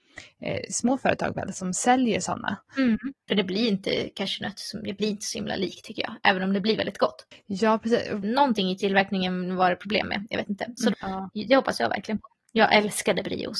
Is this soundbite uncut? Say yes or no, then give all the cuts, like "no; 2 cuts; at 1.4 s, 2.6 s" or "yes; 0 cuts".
no; 3 cuts; at 3.3 s, 8.2 s, 10.9 s